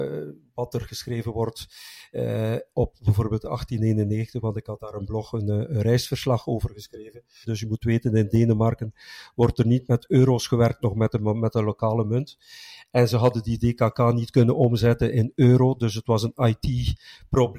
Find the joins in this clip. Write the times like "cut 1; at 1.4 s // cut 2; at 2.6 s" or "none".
cut 1; at 7.4 s